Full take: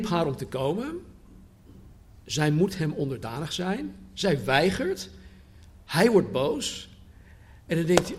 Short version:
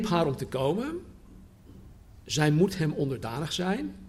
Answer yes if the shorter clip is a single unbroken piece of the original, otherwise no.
yes